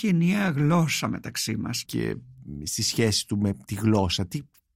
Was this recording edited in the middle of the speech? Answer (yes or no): yes